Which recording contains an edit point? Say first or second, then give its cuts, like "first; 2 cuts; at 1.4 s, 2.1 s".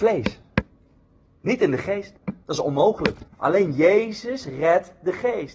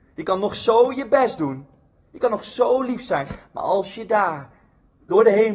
first; 2 cuts; at 2.2 s, 3.3 s